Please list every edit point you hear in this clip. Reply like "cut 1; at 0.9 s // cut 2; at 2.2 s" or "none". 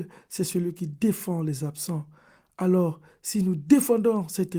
none